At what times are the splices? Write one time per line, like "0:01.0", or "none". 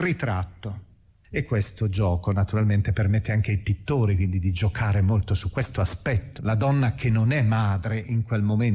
0:01.2
0:06.4